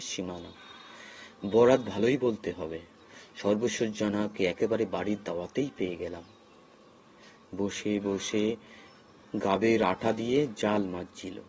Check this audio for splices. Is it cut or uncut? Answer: uncut